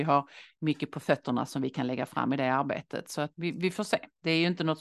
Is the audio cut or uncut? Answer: cut